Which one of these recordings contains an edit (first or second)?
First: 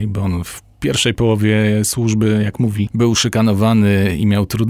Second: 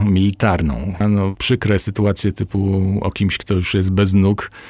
second